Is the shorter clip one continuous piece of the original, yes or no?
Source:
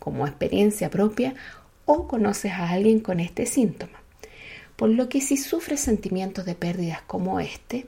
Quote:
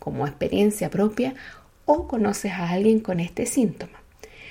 yes